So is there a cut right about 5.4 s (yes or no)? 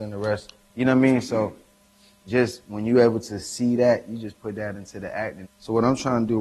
yes